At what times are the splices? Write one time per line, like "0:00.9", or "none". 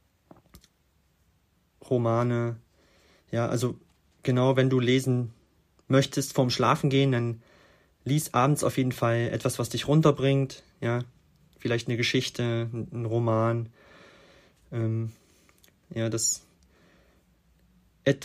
0:15.8